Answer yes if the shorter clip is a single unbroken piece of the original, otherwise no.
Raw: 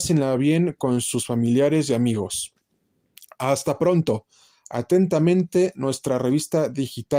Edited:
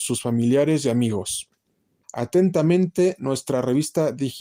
no